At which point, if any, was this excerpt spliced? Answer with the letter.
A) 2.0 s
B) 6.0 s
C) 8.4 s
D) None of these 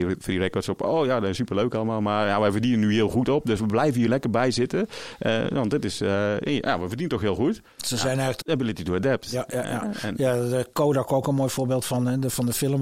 C